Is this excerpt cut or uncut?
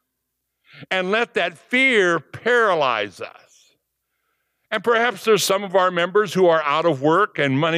cut